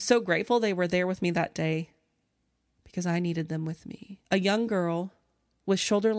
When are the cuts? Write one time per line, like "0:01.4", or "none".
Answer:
0:04.3